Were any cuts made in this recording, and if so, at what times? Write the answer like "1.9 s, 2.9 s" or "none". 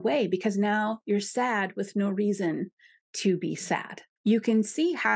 4.2 s